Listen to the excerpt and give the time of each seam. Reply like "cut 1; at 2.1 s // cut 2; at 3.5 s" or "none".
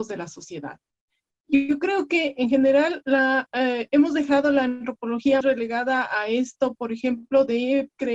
cut 1; at 5.4 s